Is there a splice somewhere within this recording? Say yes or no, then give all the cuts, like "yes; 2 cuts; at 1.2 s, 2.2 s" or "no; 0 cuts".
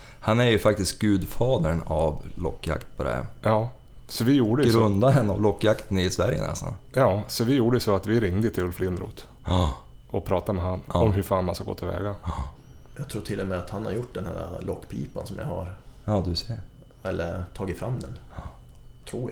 no; 0 cuts